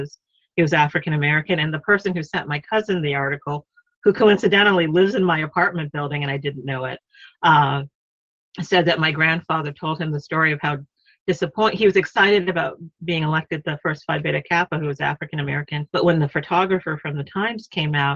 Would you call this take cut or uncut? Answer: cut